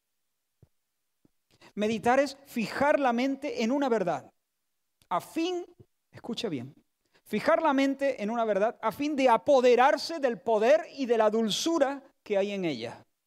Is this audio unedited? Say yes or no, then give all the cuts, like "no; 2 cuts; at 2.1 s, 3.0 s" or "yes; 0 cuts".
yes; 0 cuts